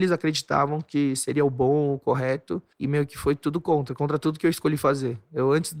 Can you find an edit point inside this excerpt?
yes; 1 cut; at 2.7 s

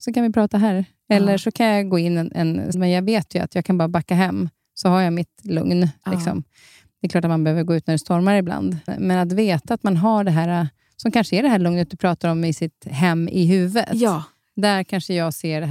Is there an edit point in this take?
yes; 2 cuts; at 2.7 s, 8.9 s

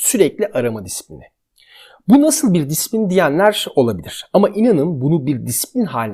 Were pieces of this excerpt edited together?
no; 0 cuts

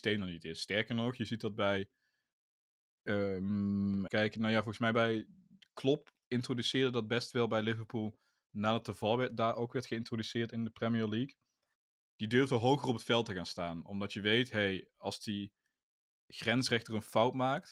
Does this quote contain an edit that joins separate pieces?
yes; 1 cut; at 4.1 s

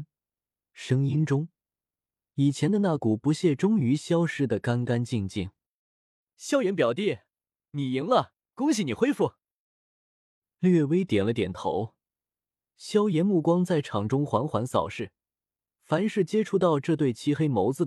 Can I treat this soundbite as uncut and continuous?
yes; 0 cuts

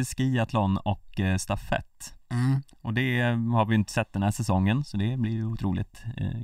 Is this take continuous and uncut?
yes; 0 cuts

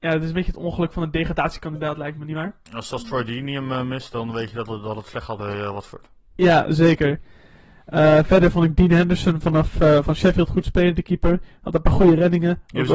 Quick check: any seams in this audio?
no; 0 cuts

